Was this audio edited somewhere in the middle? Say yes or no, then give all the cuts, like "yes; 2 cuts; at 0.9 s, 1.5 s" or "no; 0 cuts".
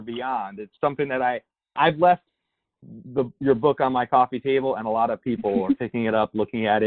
no; 0 cuts